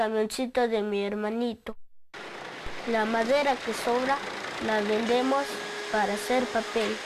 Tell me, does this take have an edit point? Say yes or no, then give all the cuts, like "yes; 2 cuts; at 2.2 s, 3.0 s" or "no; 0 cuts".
no; 0 cuts